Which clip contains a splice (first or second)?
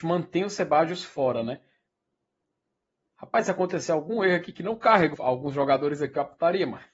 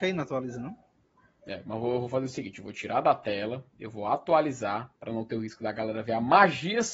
first